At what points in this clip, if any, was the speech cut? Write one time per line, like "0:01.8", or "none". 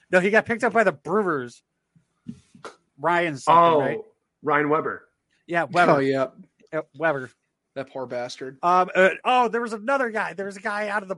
0:09.2